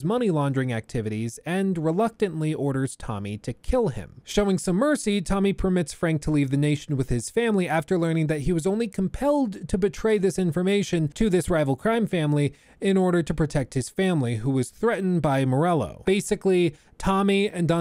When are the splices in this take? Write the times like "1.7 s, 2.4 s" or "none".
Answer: 16.0 s